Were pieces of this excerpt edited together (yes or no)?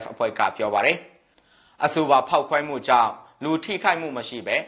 no